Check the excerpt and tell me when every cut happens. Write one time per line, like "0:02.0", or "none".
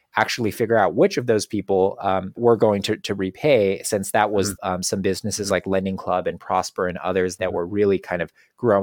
0:02.4
0:04.6
0:07.4